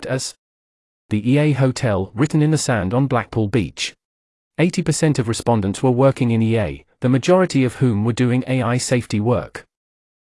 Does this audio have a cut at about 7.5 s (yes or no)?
no